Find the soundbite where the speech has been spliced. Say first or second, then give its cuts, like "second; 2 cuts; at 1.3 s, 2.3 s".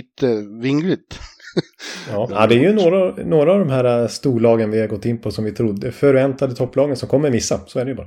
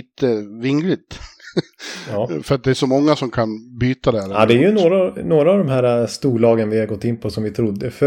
first; 1 cut; at 2.3 s